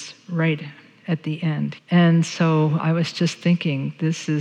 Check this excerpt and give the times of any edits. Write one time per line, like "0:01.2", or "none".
0:01.8
0:02.8